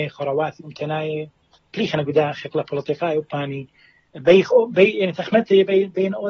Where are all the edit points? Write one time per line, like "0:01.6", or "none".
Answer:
none